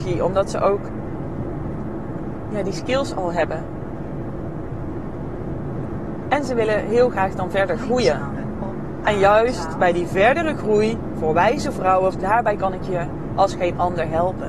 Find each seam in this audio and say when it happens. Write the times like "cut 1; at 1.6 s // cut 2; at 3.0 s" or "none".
cut 1; at 12.1 s